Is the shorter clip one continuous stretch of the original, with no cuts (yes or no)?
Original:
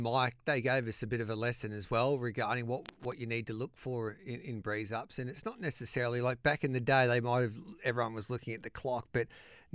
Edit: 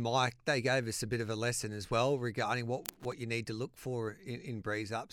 yes